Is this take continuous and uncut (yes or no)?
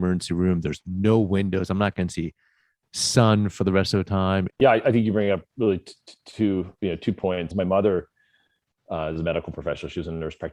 no